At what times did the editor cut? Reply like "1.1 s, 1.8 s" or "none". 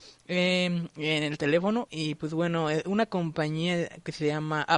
1.9 s